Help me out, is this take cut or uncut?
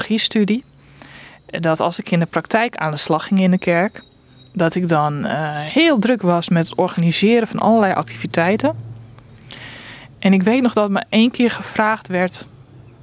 uncut